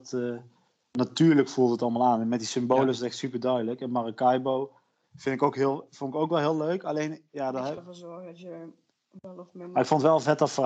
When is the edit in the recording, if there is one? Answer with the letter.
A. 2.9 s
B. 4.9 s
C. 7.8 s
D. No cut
C